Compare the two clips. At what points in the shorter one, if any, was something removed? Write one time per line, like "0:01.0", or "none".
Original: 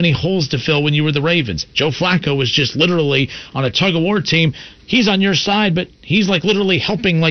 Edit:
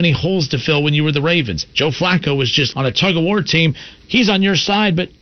0:02.7